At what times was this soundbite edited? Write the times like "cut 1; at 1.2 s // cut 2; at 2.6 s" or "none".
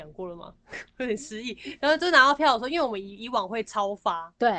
none